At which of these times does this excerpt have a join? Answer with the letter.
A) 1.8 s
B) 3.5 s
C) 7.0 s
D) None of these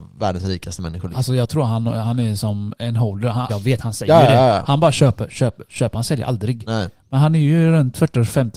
B